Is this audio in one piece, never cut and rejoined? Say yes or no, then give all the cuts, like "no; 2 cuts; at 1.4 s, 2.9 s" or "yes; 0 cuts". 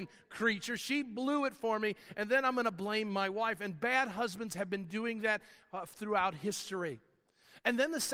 yes; 0 cuts